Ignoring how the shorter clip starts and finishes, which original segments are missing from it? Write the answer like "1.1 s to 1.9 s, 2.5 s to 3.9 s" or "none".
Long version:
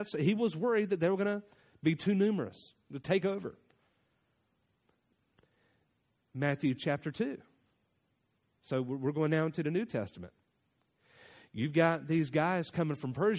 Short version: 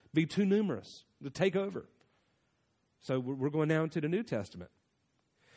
4.5 s to 8.5 s